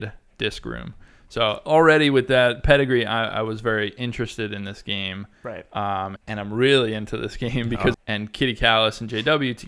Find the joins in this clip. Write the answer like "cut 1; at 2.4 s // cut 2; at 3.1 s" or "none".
cut 1; at 6.2 s // cut 2; at 7.9 s